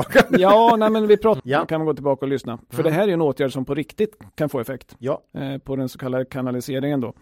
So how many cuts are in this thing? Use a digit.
1